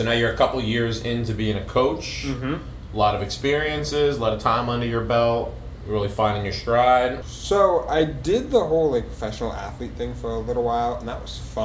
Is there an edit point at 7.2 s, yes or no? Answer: yes